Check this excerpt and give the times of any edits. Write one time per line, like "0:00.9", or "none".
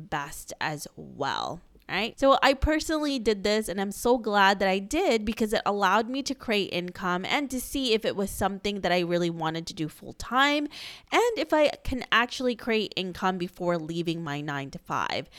0:02.1

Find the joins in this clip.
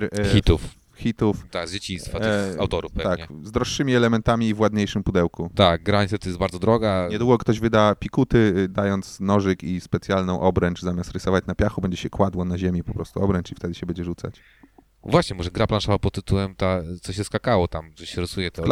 none

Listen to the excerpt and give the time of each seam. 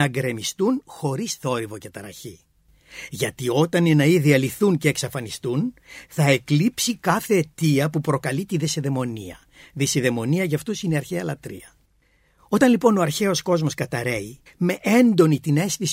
0:14.5

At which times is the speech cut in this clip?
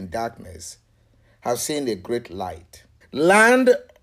0:03.0

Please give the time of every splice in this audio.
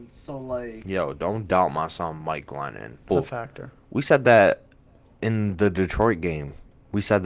0:03.1

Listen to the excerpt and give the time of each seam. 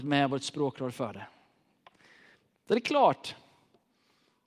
none

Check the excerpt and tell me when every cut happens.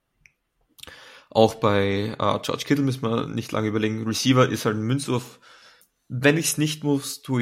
none

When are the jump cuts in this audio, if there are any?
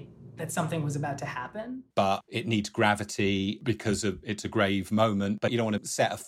0:01.9

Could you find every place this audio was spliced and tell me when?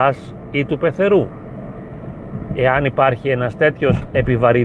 none

